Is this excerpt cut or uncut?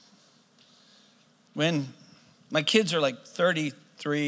uncut